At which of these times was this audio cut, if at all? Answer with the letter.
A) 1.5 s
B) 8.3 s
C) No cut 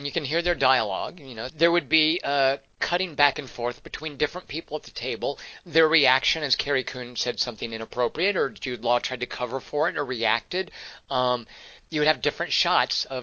A